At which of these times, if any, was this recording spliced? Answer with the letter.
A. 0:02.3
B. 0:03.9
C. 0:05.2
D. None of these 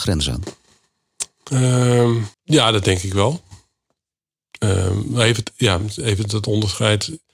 A